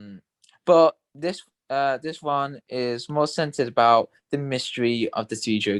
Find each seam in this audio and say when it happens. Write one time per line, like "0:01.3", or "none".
none